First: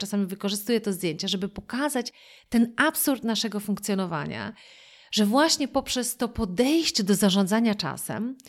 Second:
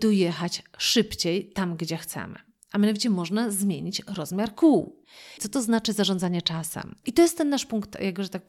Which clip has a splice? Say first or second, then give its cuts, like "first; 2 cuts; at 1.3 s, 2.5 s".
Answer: second; 2 cuts; at 5.4 s, 7.0 s